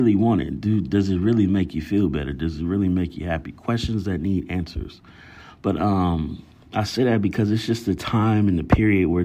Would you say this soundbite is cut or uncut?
uncut